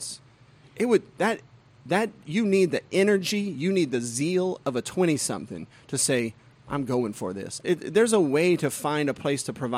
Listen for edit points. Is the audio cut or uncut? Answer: cut